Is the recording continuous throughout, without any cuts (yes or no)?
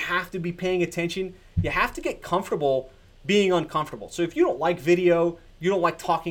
yes